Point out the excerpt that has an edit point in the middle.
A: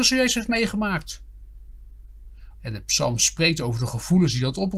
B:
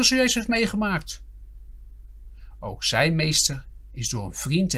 A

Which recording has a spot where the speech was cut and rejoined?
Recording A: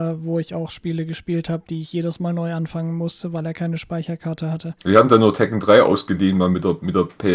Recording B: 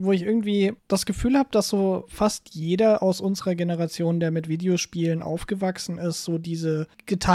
A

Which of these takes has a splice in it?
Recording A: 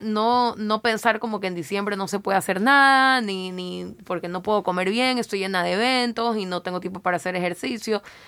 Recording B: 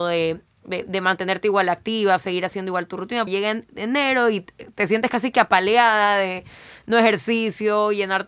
B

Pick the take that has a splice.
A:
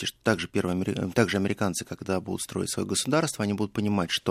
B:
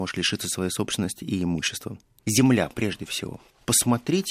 B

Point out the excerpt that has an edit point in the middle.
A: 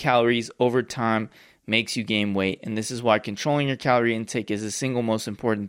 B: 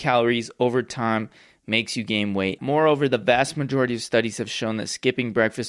B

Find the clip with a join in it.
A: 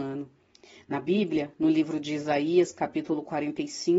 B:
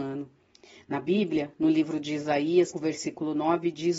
B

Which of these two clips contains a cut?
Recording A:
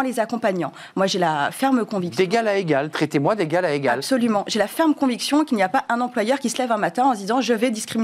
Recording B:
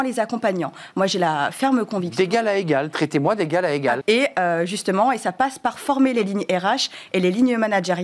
B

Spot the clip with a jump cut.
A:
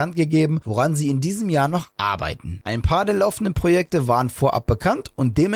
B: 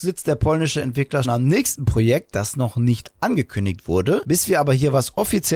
B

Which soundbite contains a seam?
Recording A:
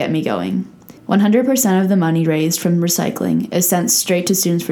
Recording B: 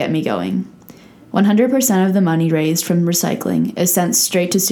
A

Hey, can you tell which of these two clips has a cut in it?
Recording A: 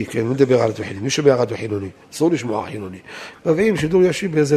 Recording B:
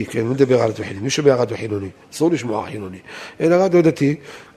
A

